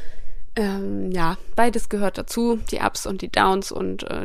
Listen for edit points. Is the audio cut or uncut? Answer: uncut